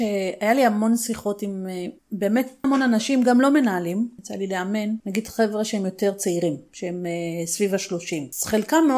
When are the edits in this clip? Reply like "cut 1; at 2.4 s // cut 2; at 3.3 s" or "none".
cut 1; at 2.6 s